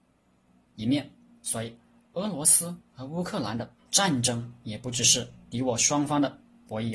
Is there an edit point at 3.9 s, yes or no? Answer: yes